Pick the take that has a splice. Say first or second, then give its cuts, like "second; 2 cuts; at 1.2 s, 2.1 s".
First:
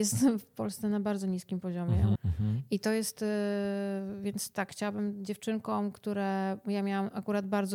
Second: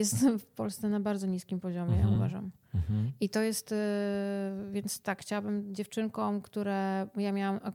first; 1 cut; at 2.2 s